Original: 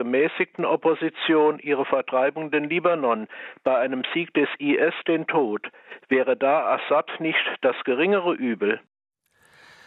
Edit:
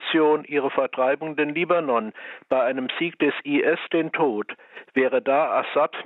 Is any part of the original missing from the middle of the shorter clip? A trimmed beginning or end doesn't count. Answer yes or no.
no